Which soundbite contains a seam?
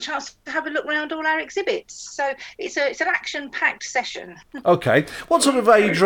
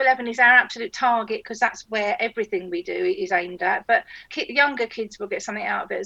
second; 1 cut; at 4.2 s

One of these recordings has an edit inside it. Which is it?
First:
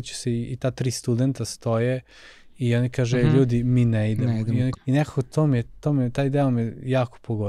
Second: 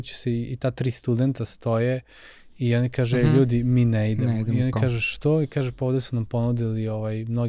first; 1 cut; at 4.7 s

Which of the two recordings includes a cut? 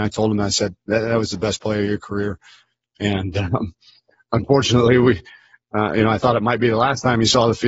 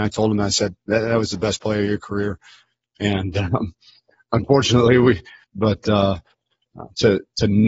second; 1 cut; at 5.4 s

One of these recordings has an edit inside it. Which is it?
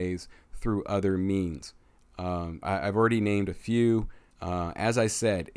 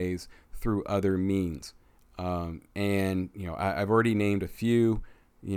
first; 2 cuts; at 2.6 s, 4.3 s

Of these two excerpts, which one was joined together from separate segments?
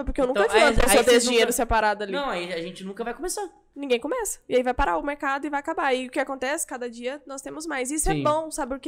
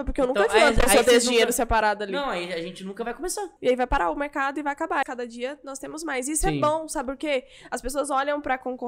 second; 2 cuts; at 3.6 s, 5.0 s

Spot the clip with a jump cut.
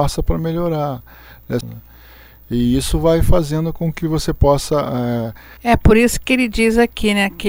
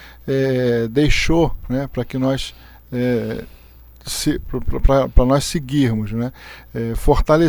first; 2 cuts; at 1.6 s, 5.6 s

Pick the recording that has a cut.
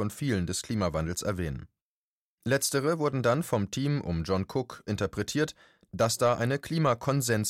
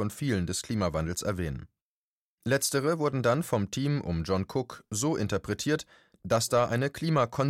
first; 1 cut; at 4.9 s

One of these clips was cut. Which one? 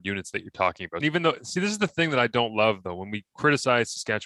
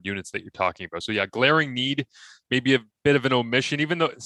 first; 1 cut; at 1.0 s

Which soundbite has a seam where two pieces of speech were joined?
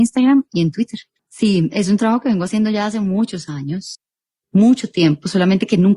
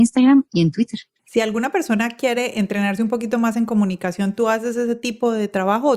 first; 1 cut; at 1.2 s

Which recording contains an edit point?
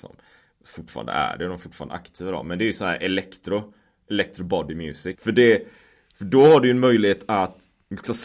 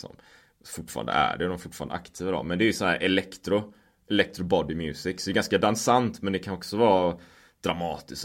first; 1 cut; at 5.1 s

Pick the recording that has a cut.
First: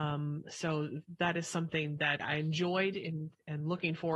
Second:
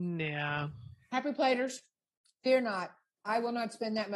first; 1 cut; at 2.2 s

